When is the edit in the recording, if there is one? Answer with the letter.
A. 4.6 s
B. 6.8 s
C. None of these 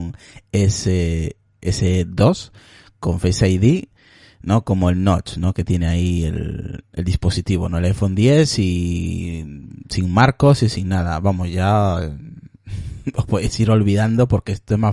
B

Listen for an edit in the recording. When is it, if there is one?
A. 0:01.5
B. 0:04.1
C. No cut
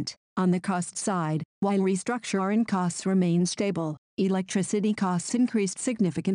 A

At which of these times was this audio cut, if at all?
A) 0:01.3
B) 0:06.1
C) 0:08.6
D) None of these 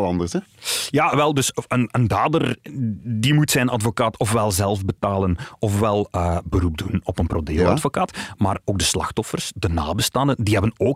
C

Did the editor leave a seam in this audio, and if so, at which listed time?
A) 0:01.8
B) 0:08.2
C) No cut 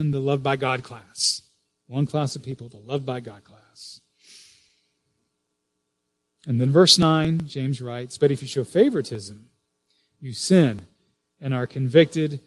C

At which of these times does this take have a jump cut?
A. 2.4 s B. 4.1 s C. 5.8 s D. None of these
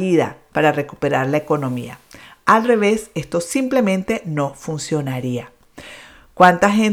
D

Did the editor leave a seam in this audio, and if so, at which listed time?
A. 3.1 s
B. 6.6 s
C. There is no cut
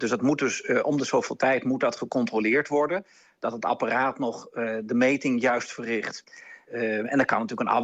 C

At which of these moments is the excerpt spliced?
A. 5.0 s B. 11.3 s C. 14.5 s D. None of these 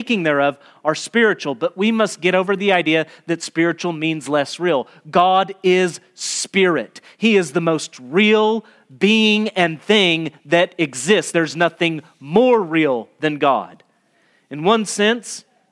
D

